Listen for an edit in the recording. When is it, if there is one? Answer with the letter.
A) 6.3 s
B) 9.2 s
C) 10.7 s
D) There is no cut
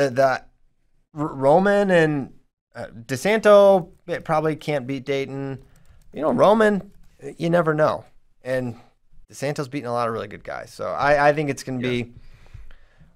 B